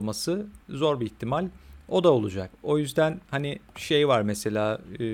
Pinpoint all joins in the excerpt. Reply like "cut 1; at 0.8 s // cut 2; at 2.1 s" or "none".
cut 1; at 2.5 s